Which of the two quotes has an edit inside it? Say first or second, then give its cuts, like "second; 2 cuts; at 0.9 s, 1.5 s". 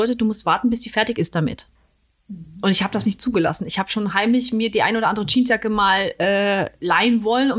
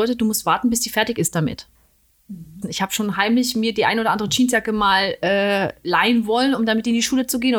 second; 1 cut; at 2.6 s